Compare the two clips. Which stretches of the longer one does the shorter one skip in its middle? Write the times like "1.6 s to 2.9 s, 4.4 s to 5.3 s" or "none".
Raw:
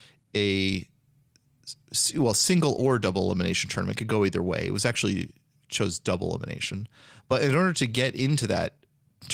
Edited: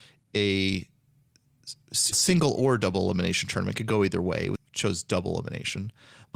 2.1 s to 2.3 s, 4.8 s to 5.5 s